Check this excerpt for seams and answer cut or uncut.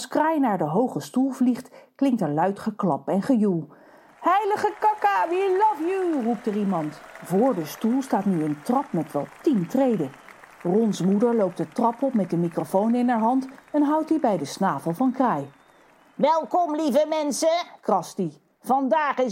uncut